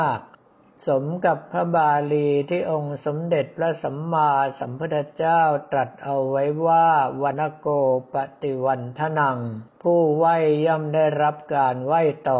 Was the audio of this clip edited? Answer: yes; 2 cuts; at 7.3 s, 9.7 s

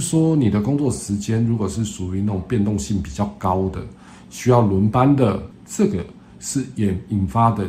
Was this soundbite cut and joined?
no; 0 cuts

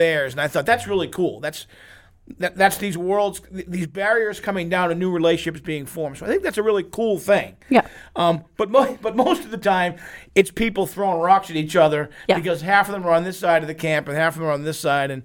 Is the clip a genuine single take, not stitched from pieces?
yes; 0 cuts

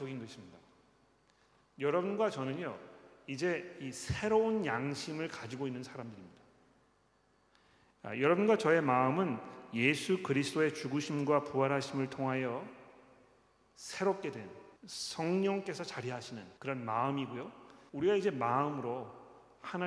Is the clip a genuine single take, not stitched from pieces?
no; 3 cuts; at 14.8 s, 16.6 s, 17.9 s

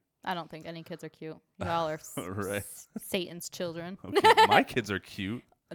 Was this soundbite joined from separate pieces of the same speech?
no; 0 cuts

